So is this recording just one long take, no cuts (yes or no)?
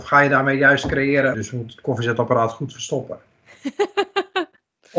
no